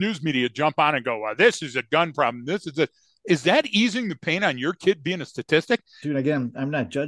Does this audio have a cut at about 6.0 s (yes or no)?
yes